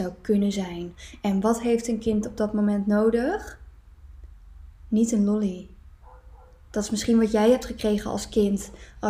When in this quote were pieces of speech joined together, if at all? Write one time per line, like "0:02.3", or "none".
none